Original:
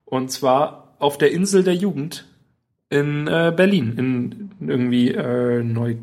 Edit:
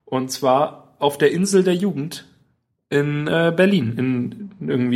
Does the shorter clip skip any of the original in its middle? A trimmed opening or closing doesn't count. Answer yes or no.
no